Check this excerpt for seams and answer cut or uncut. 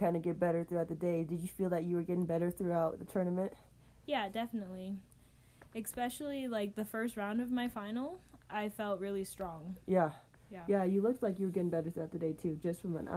uncut